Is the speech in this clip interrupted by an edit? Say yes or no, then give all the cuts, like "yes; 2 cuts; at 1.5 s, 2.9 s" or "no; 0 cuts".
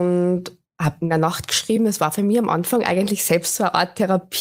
no; 0 cuts